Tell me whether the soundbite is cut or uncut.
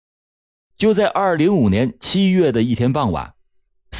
cut